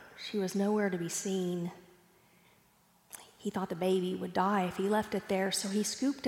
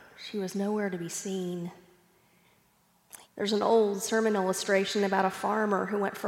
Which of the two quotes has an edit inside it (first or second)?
second